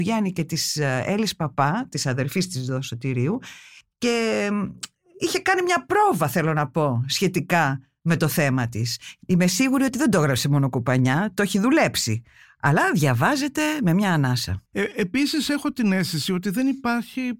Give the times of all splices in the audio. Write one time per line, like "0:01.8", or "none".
none